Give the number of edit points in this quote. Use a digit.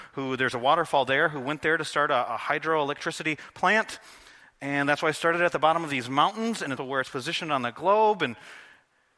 1